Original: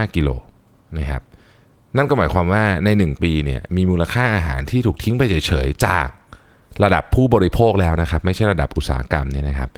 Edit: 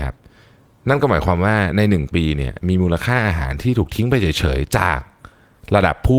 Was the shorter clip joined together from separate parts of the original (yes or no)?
no